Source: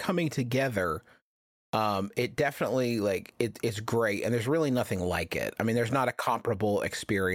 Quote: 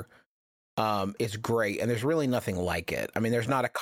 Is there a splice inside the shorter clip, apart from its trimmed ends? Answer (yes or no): yes